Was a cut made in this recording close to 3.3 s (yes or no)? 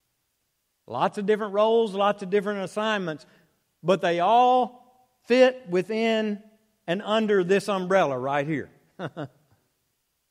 no